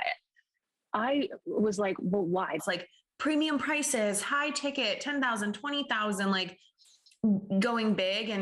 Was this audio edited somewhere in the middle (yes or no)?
yes